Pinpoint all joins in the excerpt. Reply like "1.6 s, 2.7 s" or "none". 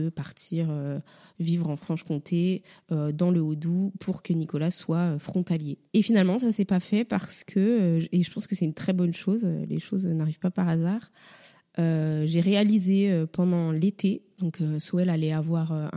5.9 s